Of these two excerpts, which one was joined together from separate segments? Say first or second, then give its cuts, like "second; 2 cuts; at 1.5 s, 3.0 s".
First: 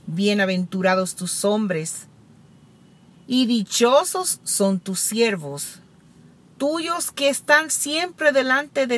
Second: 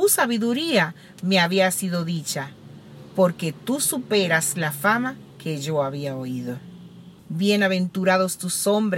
second; 1 cut; at 7.2 s